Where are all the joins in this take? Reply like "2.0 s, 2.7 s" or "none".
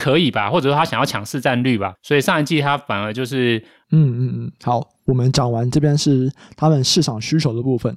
3.8 s